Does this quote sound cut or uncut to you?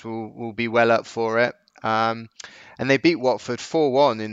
uncut